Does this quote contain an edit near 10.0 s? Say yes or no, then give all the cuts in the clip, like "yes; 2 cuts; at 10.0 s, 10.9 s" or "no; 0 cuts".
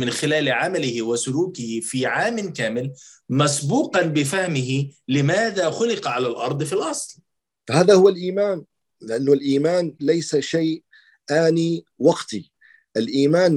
yes; 1 cut; at 10.0 s